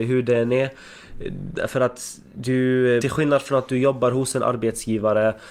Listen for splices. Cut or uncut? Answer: cut